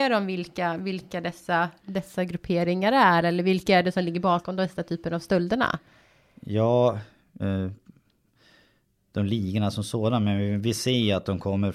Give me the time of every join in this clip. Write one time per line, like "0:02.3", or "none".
0:07.4